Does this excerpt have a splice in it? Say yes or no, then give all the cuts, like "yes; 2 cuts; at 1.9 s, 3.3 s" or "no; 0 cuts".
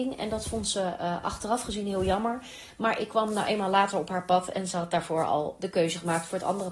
no; 0 cuts